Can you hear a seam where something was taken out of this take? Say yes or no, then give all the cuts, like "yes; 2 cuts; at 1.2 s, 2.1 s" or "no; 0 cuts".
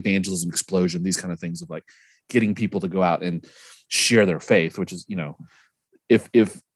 no; 0 cuts